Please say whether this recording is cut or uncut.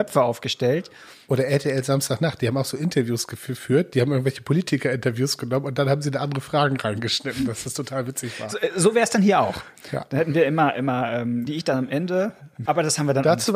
cut